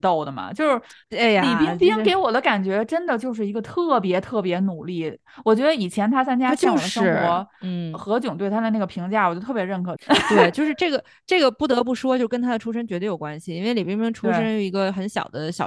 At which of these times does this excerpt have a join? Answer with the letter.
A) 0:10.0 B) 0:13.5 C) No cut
A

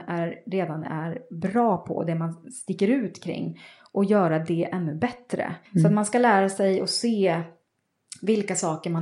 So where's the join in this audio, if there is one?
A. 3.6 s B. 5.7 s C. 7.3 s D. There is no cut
B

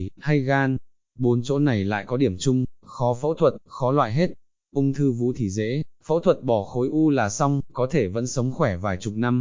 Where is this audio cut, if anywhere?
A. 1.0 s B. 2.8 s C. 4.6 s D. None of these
B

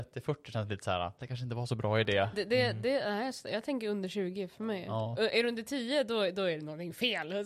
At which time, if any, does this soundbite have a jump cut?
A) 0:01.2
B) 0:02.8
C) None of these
A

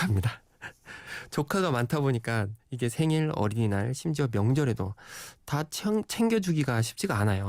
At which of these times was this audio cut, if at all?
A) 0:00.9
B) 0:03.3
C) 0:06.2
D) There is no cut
D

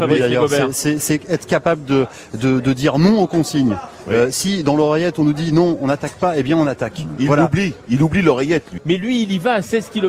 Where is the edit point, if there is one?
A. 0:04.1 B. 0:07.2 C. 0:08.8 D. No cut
C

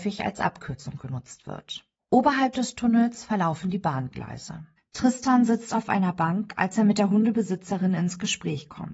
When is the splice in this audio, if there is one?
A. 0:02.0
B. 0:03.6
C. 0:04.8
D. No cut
C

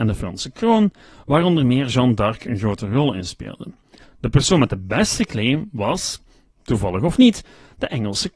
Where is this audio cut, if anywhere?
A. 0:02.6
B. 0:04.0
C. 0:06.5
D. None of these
B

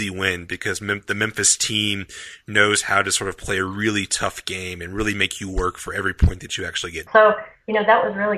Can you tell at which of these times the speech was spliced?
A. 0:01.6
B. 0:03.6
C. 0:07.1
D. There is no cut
C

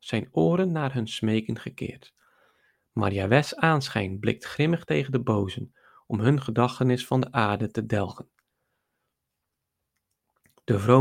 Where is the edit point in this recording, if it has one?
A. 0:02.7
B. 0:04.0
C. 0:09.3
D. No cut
D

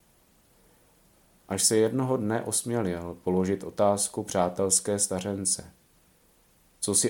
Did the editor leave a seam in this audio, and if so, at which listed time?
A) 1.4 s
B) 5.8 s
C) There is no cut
C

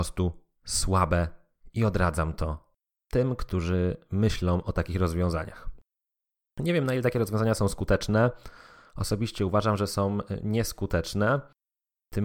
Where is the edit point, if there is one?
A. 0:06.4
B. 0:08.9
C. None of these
C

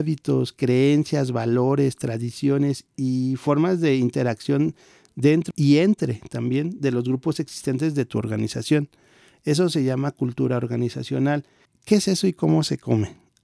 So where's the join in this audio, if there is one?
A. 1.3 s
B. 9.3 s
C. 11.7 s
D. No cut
C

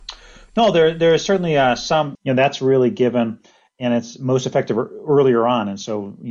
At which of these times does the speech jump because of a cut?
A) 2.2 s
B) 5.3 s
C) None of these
A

